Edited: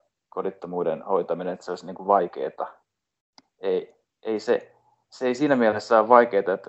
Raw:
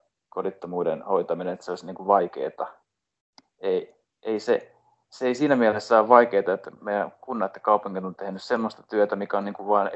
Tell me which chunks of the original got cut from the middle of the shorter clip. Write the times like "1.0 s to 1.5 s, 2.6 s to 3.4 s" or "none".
none